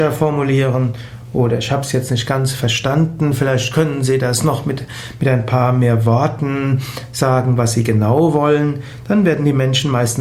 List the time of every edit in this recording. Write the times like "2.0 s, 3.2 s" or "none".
none

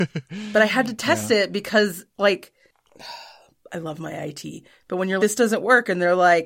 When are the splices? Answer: 5.2 s

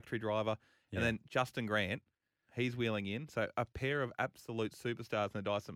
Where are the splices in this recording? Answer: 2.5 s

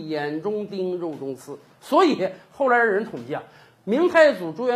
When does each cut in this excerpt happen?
none

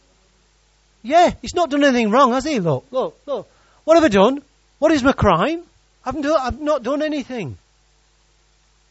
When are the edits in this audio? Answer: none

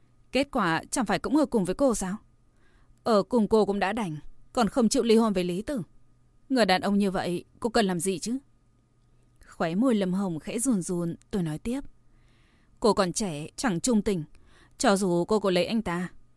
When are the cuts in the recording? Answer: 13.5 s

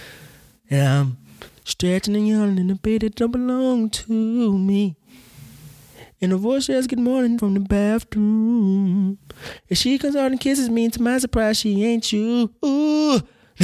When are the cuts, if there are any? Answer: 7.4 s

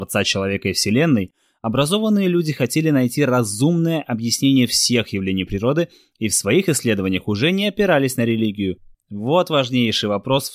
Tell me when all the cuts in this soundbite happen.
8.9 s

